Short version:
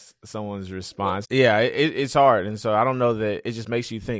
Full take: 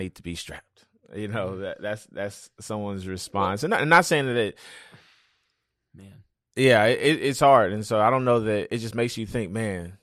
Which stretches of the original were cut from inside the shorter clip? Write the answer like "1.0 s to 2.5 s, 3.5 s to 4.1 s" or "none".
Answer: 3.6 s to 6.5 s